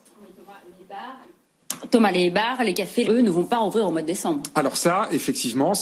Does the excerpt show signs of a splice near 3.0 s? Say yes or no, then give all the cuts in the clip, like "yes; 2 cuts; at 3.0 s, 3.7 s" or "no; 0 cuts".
yes; 1 cut; at 3.0 s